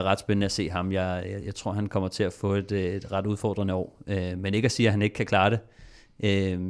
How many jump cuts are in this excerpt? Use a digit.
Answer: 0